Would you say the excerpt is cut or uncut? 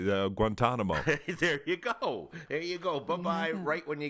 uncut